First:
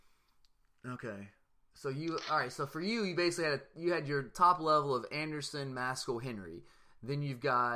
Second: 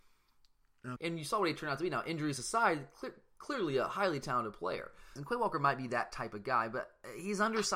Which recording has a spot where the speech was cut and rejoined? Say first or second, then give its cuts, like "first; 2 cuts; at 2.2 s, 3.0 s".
second; 2 cuts; at 1.0 s, 5.2 s